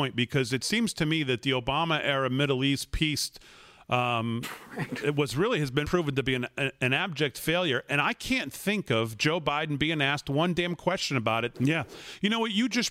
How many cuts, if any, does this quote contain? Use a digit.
2